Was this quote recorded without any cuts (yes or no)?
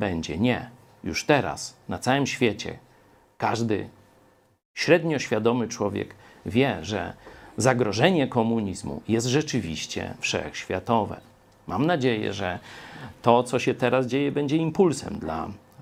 yes